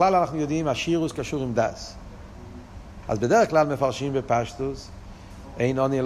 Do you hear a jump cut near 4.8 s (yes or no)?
no